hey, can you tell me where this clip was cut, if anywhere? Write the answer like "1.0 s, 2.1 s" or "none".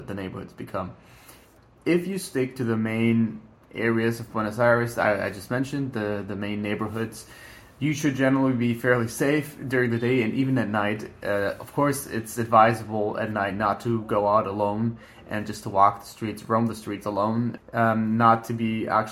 17.6 s

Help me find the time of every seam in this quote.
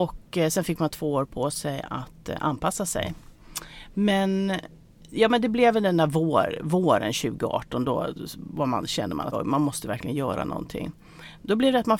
9.3 s

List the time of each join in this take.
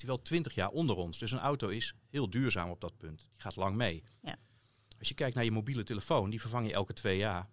none

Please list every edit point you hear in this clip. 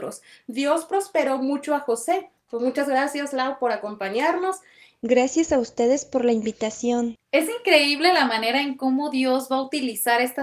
none

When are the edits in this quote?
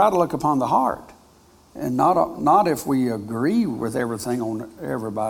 none

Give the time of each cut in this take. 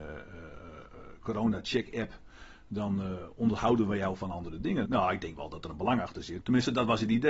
4.8 s, 6.4 s

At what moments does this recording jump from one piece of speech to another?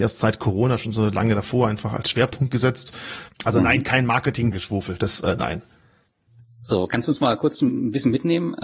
3.3 s, 4.5 s

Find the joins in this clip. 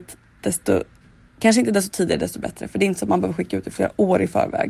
none

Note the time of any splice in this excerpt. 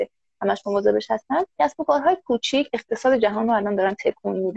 1.5 s

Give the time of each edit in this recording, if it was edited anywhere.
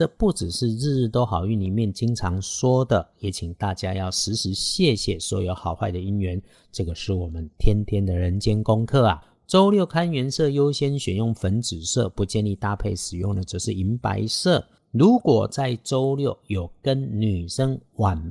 none

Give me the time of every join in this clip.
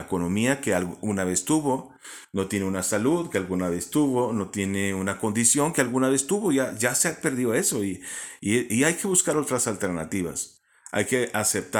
none

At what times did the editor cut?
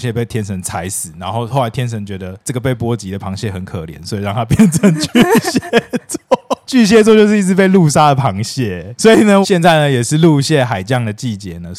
6.7 s, 9.4 s

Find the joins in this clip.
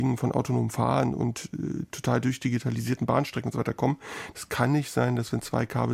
4.3 s

